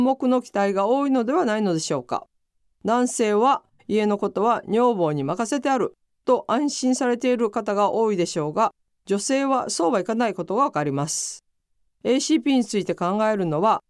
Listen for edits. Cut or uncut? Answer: uncut